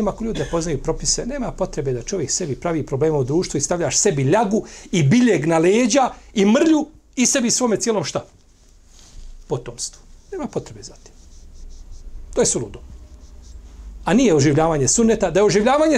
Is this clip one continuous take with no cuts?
yes; 0 cuts

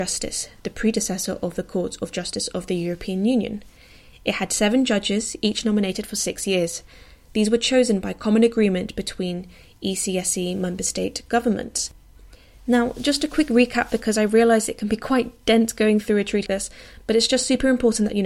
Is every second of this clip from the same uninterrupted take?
no; 2 cuts; at 12.6 s, 16.5 s

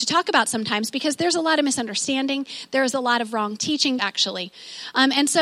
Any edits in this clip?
yes; 1 cut; at 4.0 s

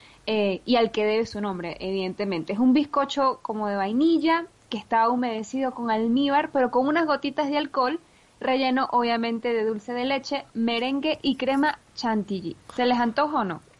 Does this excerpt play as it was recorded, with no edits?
no; 2 cuts; at 10.5 s, 11.9 s

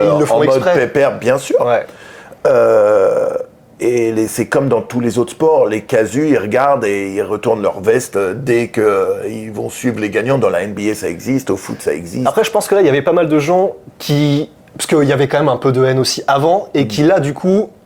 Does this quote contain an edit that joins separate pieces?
no; 0 cuts

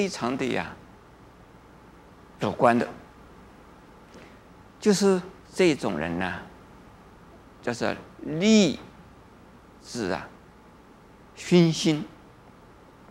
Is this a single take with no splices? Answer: no; 2 cuts; at 5.4 s, 7.6 s

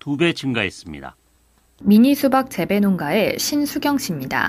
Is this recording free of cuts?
yes; 0 cuts

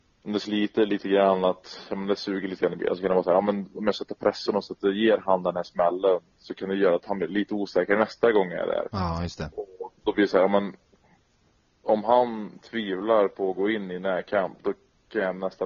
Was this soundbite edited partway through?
no; 0 cuts

